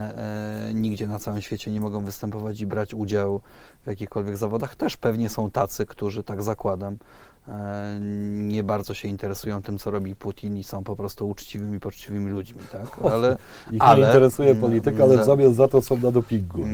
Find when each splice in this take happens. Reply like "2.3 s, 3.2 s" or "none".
none